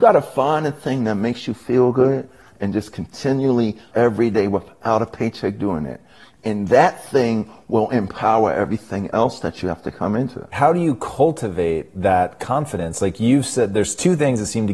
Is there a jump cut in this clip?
yes; 1 cut; at 3.9 s

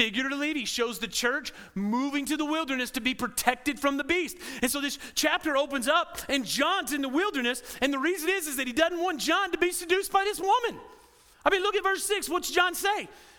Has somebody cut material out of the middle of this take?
no; 0 cuts

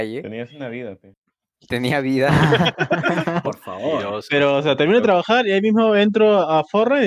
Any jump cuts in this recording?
yes; 1 cut; at 3.4 s

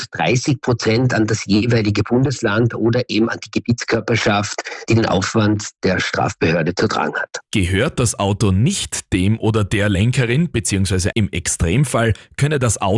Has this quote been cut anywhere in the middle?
yes; 1 cut; at 11.1 s

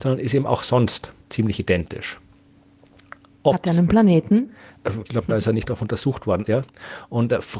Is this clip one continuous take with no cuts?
no; 3 cuts; at 1.2 s, 5.1 s, 6.5 s

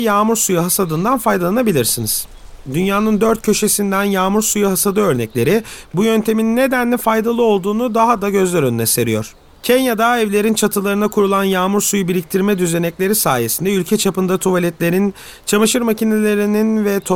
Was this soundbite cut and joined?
no; 0 cuts

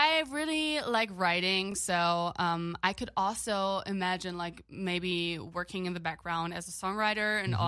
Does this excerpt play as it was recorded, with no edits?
yes; 0 cuts

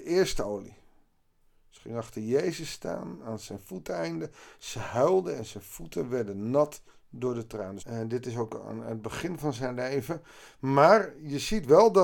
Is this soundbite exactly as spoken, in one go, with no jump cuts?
no; 1 cut; at 7.8 s

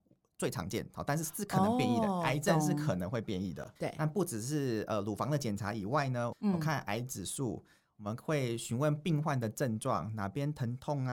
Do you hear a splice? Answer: yes; 2 cuts; at 3.8 s, 6.3 s

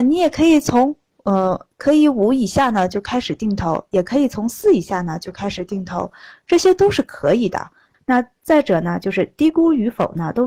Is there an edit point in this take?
yes; 1 cut; at 7.9 s

